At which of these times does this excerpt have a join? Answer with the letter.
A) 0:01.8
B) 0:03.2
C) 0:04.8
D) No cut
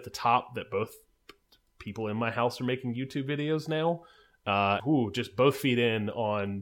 C